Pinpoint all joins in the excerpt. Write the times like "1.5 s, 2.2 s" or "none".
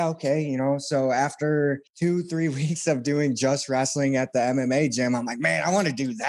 1.9 s